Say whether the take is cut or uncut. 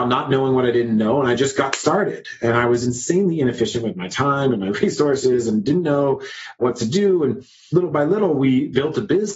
uncut